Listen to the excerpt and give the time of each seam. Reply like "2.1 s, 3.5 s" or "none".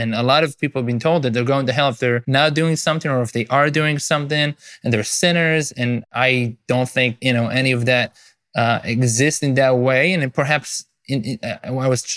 none